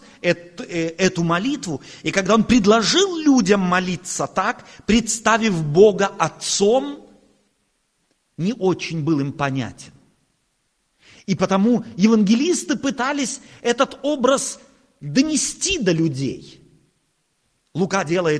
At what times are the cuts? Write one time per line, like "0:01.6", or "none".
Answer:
none